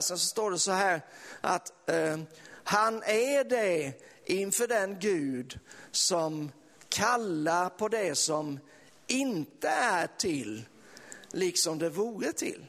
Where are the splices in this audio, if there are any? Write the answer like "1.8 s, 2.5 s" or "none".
none